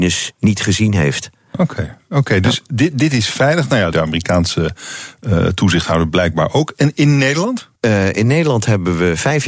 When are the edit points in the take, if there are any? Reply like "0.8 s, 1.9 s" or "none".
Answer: 3.9 s, 7.8 s